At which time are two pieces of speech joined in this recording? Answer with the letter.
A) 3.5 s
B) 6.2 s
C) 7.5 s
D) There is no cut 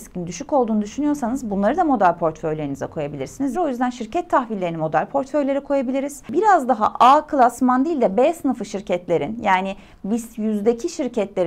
A